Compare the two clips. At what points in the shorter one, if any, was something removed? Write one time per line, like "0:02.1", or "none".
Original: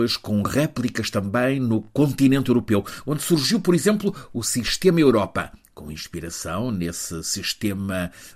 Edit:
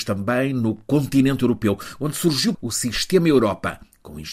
0:02.5